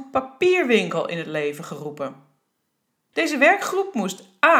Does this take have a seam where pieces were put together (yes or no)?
yes